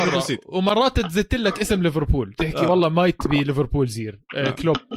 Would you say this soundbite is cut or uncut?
uncut